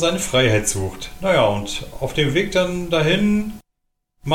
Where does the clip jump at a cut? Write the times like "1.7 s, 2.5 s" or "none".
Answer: none